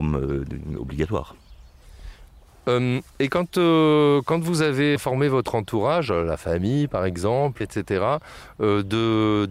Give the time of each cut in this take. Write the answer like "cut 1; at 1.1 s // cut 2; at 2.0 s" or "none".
cut 1; at 3.1 s // cut 2; at 5.0 s // cut 3; at 7.6 s